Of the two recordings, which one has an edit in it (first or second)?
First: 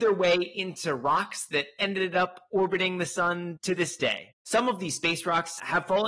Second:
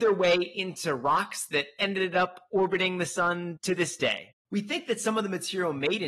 second